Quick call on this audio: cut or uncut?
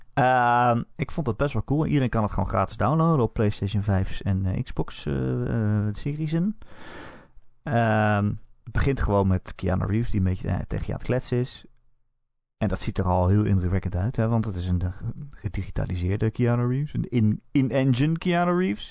uncut